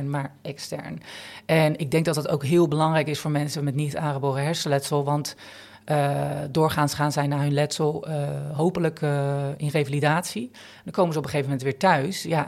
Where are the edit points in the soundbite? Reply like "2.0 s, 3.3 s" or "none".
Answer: none